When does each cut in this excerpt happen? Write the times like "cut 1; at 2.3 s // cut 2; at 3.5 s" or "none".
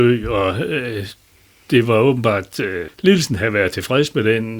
cut 1; at 2.9 s